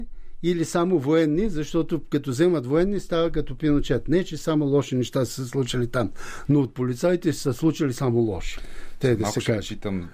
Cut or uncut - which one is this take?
uncut